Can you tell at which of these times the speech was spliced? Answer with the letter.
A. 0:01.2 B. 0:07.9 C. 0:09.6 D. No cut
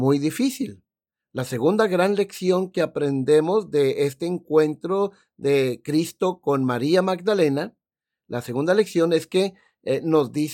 A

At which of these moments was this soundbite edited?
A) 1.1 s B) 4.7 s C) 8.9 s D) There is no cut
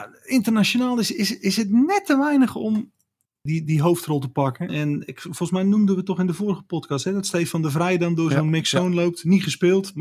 B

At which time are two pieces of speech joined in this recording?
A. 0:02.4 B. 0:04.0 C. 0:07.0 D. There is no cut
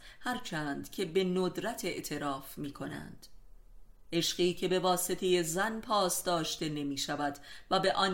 B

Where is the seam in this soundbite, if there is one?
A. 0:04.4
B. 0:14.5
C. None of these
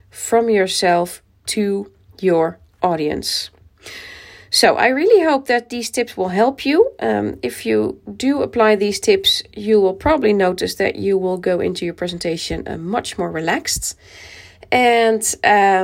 C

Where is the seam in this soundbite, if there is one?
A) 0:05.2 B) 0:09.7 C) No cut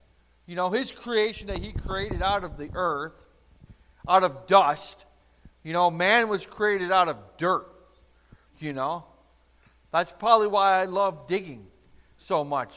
C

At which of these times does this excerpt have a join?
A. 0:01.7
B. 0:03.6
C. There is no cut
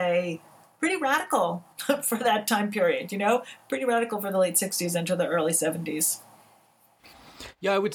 C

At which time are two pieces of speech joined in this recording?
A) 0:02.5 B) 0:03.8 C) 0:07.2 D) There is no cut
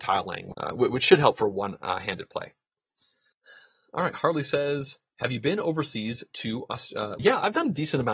C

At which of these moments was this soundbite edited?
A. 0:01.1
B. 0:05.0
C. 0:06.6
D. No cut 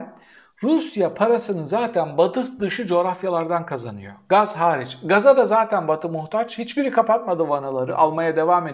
D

